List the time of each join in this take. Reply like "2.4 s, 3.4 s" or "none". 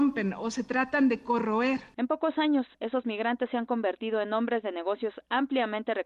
1.9 s